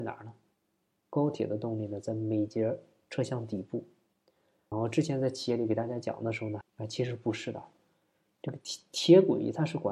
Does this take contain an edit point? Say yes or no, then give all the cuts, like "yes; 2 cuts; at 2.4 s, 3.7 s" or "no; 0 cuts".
yes; 2 cuts; at 4.7 s, 6.6 s